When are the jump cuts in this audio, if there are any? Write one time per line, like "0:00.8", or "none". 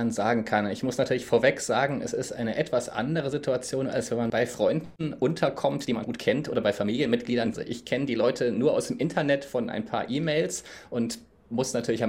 0:06.0